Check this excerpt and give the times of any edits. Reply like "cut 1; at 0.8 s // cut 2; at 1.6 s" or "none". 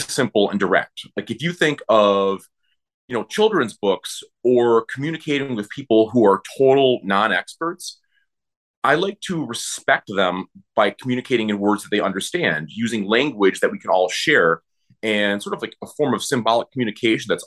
none